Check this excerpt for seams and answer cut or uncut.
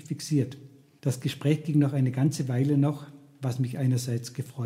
cut